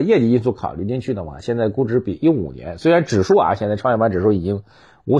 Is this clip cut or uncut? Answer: uncut